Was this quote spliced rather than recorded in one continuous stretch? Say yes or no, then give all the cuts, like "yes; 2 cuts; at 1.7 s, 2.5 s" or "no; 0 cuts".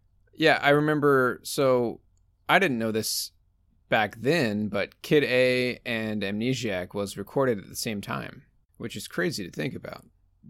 no; 0 cuts